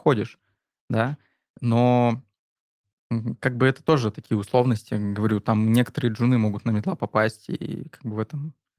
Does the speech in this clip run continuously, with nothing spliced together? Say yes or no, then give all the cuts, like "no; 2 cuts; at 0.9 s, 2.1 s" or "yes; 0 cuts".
yes; 0 cuts